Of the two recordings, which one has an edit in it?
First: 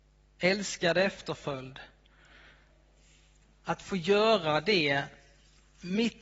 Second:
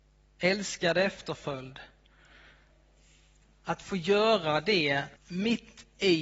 second; 1 cut; at 5.2 s

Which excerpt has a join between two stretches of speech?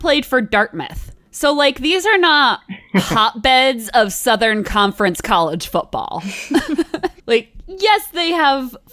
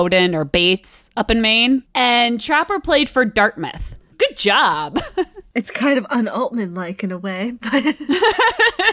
second; 1 cut; at 4.1 s

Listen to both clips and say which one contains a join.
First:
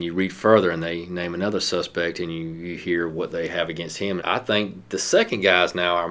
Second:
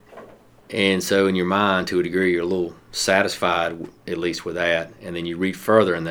first; 1 cut; at 4.2 s

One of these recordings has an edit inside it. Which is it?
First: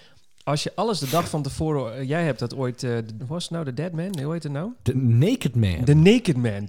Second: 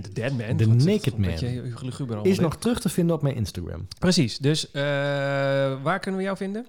first; 1 cut; at 3.2 s

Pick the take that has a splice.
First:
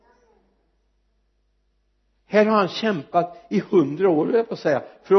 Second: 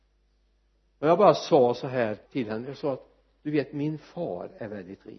second; 1 cut; at 2.3 s

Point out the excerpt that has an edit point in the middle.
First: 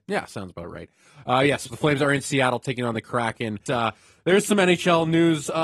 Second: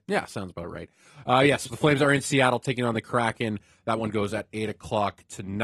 first; 1 cut; at 3.7 s

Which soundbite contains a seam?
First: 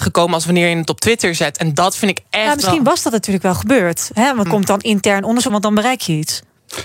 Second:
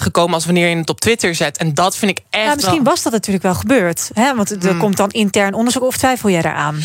first; 2 cuts; at 4.5 s, 5.5 s

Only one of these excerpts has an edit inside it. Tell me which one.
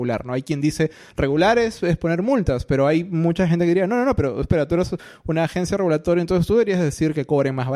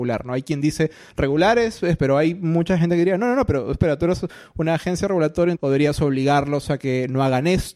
second; 2 cuts; at 2.0 s, 5.6 s

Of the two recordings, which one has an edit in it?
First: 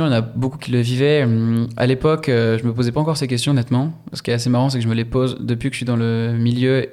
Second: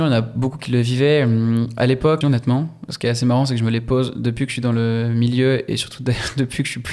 second; 1 cut; at 2.2 s

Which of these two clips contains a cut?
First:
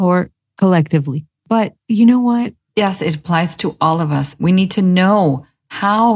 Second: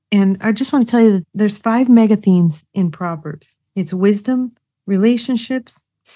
first; 2 cuts; at 2.7 s, 4.4 s

